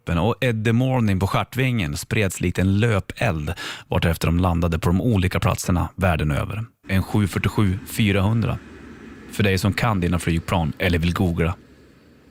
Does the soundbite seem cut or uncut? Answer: cut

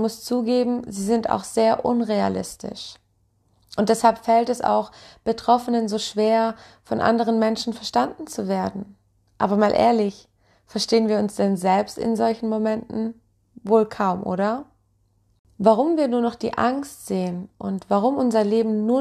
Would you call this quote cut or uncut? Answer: uncut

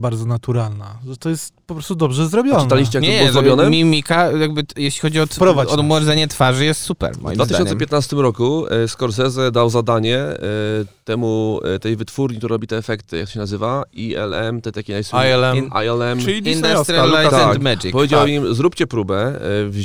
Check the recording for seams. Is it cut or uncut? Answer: uncut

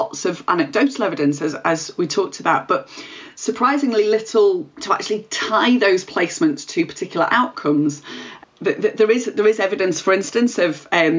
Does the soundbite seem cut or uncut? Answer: cut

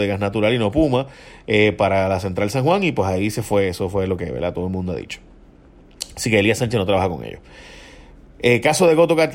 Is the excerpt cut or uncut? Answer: uncut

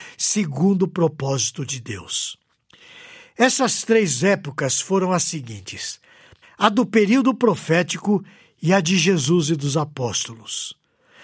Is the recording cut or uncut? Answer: cut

